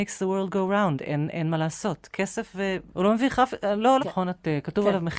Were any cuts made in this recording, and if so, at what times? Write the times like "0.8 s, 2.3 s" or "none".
2.9 s, 4.0 s